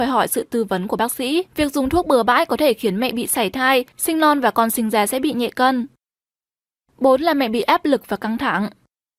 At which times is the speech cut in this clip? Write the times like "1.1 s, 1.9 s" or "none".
1.5 s